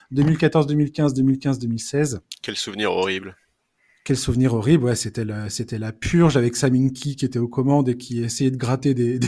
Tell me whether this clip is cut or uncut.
uncut